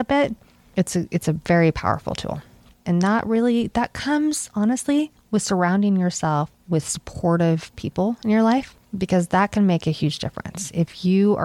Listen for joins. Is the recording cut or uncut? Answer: cut